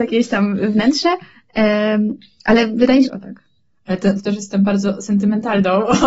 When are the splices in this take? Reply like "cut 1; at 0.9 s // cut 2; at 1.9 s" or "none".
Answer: cut 1; at 3.0 s // cut 2; at 4.2 s